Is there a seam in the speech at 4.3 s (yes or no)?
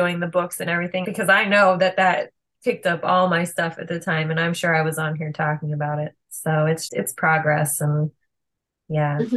no